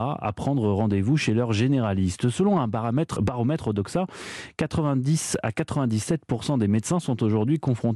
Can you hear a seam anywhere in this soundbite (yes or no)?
yes